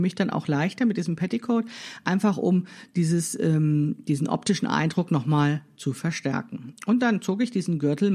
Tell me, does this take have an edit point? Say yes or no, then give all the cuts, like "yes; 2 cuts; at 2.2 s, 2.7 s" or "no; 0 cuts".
no; 0 cuts